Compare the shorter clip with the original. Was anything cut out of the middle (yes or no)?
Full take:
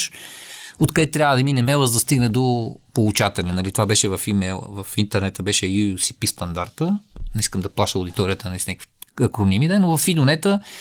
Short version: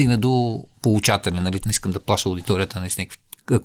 yes